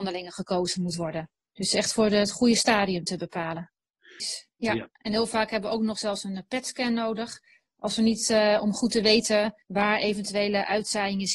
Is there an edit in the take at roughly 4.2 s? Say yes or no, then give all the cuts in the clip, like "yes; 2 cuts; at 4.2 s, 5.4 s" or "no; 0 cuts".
yes; 2 cuts; at 4.2 s, 9.6 s